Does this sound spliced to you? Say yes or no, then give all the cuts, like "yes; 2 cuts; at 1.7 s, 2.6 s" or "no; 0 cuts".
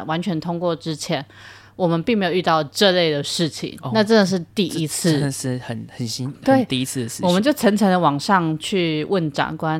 no; 0 cuts